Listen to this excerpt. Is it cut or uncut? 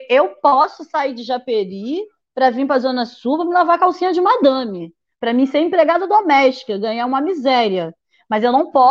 uncut